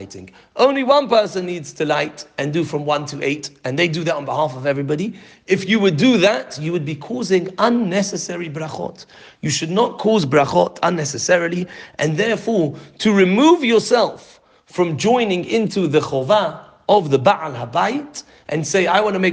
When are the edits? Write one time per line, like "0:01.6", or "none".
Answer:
none